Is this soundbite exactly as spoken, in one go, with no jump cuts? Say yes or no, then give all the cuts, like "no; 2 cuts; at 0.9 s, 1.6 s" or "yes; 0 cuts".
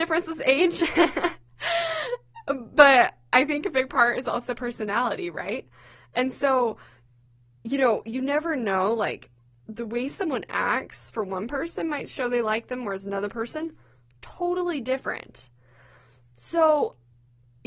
yes; 0 cuts